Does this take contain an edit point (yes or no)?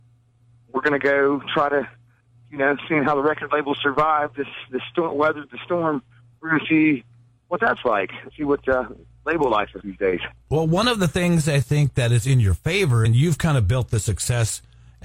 yes